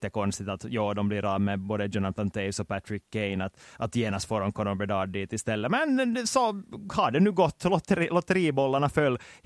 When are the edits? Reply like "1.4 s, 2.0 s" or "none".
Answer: none